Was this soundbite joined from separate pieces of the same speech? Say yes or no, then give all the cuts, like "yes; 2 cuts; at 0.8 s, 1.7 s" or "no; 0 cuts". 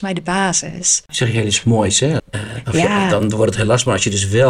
yes; 1 cut; at 2.2 s